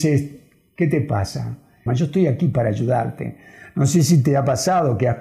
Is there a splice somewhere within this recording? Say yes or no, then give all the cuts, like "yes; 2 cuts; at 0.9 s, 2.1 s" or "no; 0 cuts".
yes; 1 cut; at 1.9 s